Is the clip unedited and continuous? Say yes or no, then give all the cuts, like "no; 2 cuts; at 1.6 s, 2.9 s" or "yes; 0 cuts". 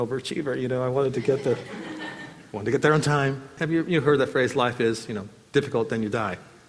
no; 1 cut; at 3.6 s